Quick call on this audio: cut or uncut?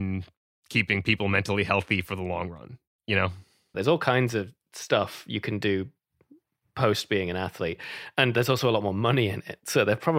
cut